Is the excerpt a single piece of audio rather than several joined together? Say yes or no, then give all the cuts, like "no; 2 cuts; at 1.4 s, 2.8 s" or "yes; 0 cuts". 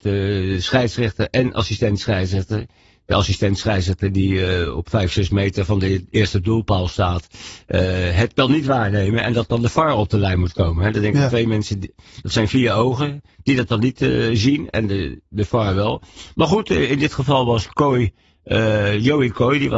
yes; 0 cuts